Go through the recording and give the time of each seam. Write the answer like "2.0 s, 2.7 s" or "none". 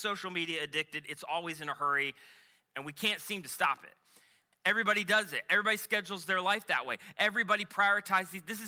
4.5 s